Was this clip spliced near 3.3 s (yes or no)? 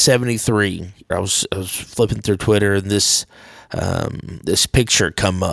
no